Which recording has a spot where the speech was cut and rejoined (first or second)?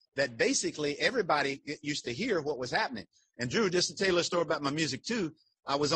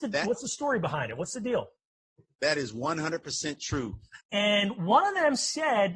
second